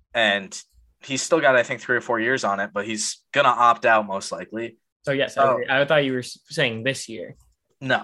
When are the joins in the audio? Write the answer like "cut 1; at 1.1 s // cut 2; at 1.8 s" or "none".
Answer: cut 1; at 4.9 s